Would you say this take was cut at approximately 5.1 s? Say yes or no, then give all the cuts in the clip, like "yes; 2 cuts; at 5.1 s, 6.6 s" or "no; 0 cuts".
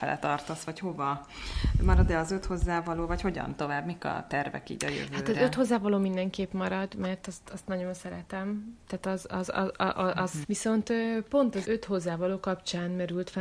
no; 2 cuts; at 10.4 s, 11.6 s